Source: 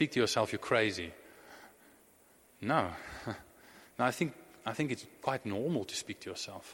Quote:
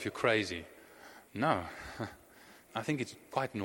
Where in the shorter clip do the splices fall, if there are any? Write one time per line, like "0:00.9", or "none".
0:01.3
0:02.7